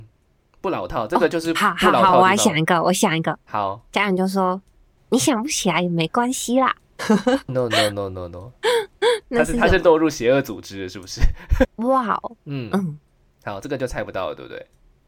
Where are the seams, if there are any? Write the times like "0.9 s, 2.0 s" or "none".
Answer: 7.5 s, 11.6 s